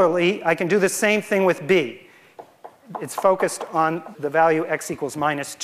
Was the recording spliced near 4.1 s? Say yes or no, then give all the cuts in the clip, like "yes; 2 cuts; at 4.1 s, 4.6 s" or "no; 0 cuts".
yes; 1 cut; at 4.1 s